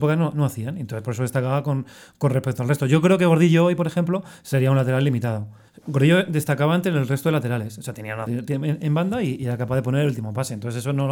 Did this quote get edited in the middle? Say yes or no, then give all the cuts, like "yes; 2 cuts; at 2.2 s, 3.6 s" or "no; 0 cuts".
yes; 2 cuts; at 5.7 s, 8.3 s